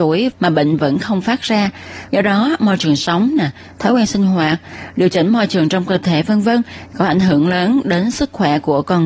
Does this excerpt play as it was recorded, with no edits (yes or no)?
no